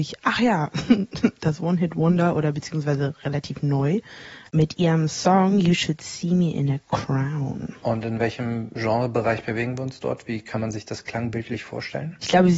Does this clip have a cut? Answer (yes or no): no